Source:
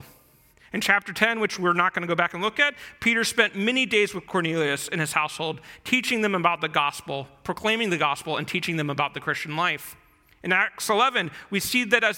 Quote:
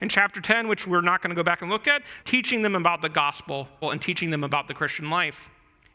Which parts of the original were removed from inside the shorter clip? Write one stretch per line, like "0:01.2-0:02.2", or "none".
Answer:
0:02.9-0:05.8
0:07.4-0:08.3